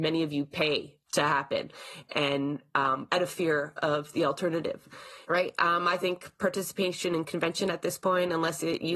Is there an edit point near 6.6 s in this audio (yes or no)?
no